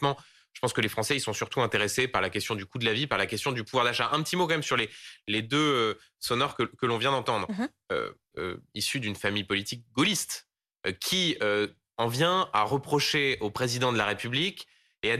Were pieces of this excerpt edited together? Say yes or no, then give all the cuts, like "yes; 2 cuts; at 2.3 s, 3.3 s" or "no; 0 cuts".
yes; 1 cut; at 8.3 s